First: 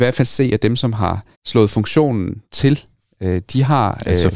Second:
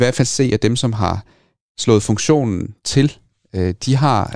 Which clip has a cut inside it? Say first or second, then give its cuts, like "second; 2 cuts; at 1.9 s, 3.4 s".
first; 1 cut; at 1.3 s